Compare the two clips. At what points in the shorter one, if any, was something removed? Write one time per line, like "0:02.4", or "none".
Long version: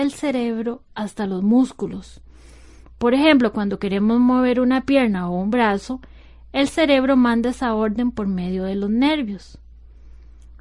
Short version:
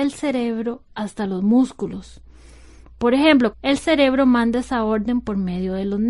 0:03.5